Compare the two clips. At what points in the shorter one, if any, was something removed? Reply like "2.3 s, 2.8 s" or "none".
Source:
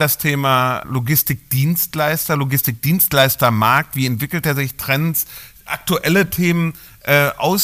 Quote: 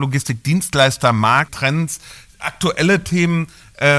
1.5 s

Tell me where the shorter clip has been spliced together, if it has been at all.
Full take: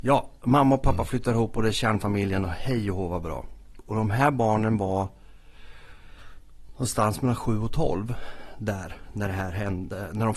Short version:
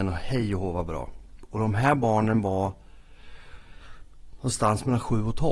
none

